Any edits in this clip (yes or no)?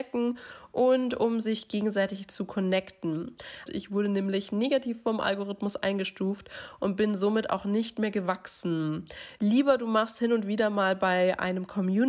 yes